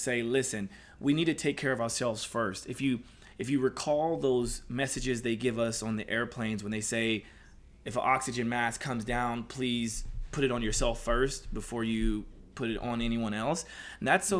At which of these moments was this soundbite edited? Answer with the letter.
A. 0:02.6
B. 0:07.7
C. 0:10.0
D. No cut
D